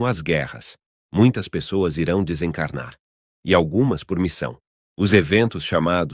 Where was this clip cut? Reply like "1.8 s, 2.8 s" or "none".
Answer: 1.0 s, 4.7 s